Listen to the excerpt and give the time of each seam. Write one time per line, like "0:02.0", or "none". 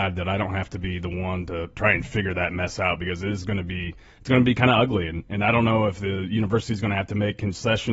none